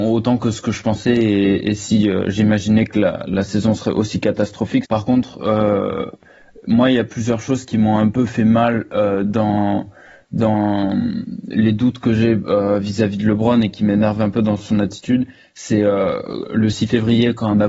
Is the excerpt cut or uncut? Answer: cut